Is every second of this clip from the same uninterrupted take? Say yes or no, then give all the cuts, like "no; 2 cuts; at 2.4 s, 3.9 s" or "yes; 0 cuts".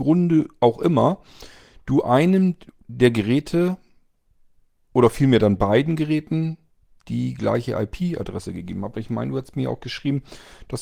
yes; 0 cuts